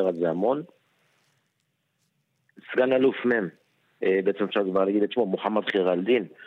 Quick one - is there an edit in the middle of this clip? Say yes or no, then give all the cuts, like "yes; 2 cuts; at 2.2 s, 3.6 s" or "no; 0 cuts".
yes; 1 cut; at 3.8 s